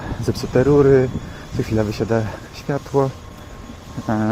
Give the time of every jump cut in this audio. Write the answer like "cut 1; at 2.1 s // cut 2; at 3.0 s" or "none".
none